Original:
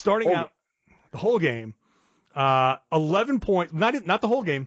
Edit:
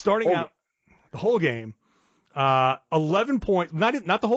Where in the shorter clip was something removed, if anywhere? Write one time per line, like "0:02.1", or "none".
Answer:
none